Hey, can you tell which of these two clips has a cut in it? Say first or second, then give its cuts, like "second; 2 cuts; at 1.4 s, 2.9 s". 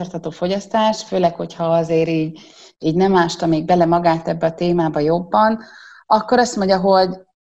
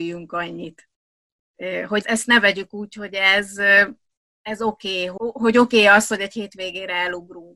second; 2 cuts; at 2.0 s, 5.2 s